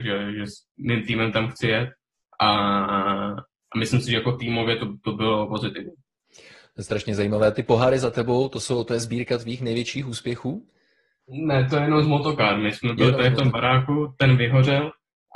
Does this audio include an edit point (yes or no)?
no